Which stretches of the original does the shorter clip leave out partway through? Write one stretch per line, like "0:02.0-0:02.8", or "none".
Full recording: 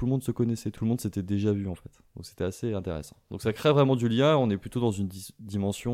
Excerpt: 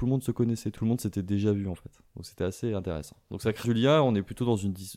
0:03.6-0:04.0

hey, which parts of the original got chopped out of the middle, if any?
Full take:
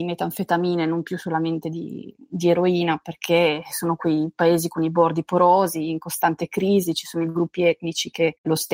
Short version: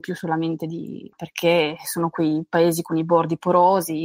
0:02.2-0:03.0

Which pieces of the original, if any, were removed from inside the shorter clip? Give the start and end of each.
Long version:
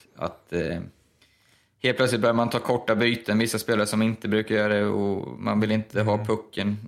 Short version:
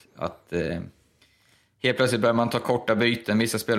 none

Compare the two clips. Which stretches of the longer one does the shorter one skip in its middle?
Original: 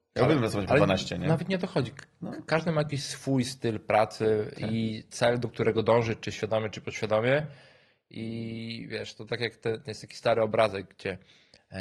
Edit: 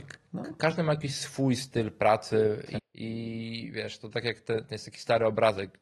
0:04.7-0:07.9

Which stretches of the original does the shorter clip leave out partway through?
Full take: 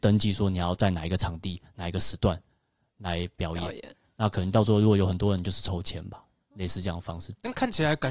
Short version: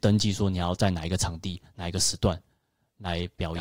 none

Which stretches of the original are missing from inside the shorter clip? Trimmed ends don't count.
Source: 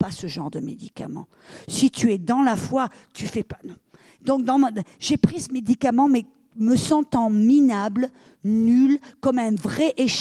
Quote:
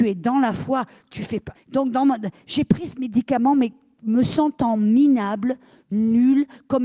0:03.6-0:04.1

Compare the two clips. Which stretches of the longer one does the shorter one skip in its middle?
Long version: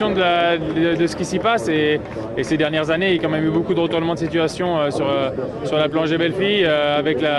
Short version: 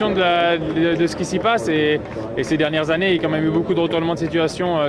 none

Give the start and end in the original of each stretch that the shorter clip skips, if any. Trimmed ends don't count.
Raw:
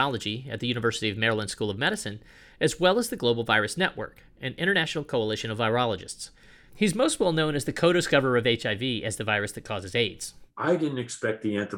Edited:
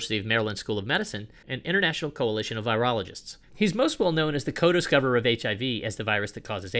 0:02.3-0:04.4
0:06.4-0:06.6

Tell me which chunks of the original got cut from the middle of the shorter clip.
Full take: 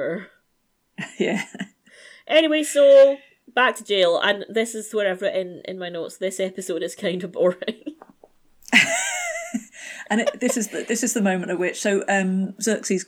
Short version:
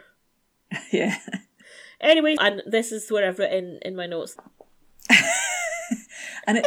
0:02.6-0:04.2
0:06.2-0:08.0

